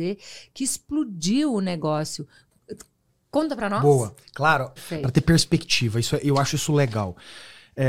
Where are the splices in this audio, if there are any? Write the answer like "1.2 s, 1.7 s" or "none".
4.8 s